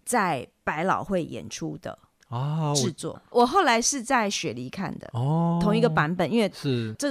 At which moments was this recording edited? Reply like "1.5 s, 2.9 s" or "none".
3.1 s